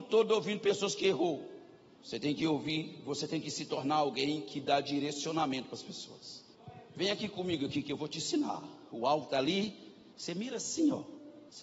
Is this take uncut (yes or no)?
yes